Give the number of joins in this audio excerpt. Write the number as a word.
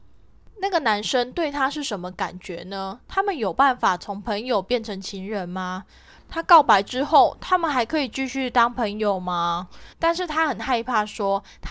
two